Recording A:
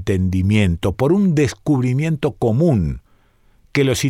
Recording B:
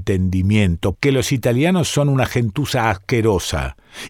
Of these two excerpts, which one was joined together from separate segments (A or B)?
B